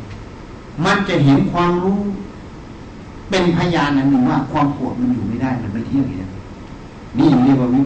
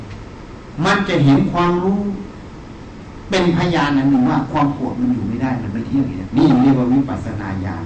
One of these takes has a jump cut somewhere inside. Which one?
second; 1 cut; at 6.3 s

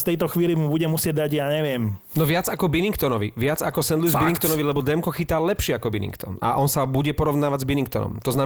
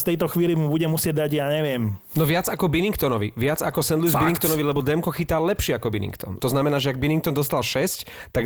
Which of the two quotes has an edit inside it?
second; 1 cut; at 6.4 s

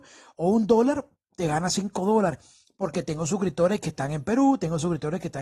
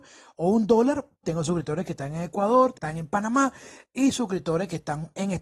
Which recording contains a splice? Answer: second; 2 cuts; at 1.2 s, 2.7 s

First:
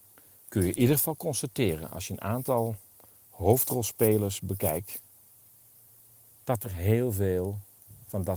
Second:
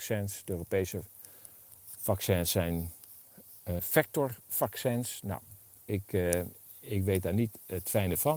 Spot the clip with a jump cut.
second; 1 cut; at 3.8 s

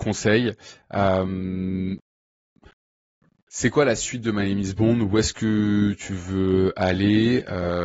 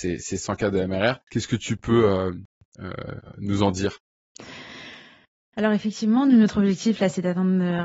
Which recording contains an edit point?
second; 1 cut; at 1.2 s

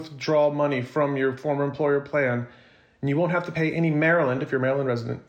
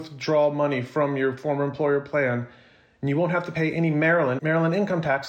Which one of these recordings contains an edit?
second; 1 cut; at 4.4 s

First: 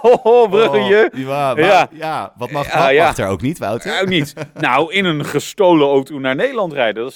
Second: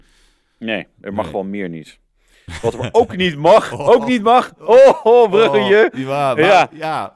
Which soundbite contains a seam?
second; 1 cut; at 5.0 s

